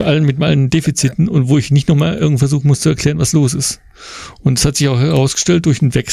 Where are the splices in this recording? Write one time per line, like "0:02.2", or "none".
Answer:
none